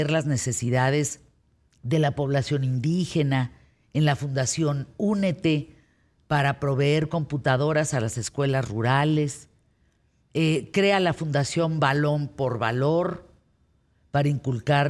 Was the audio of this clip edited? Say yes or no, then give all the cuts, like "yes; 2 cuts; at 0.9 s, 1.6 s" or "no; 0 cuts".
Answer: no; 0 cuts